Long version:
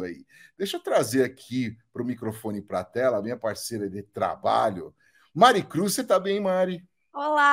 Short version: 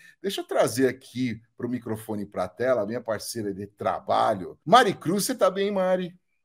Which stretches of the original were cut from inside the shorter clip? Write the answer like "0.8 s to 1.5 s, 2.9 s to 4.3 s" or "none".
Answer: 5.0 s to 5.3 s